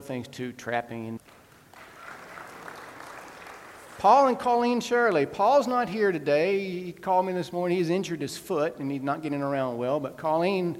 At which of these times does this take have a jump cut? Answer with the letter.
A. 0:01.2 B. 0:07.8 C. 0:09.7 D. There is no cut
A